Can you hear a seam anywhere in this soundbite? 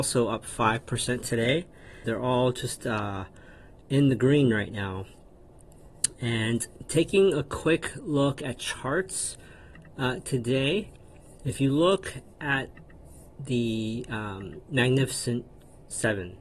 yes; 1 cut; at 2.0 s

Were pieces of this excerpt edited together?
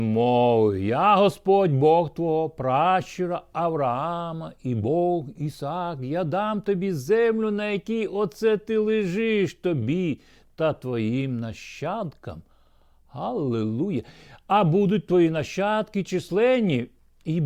no; 0 cuts

